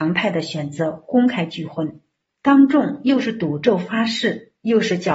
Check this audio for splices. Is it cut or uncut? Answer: uncut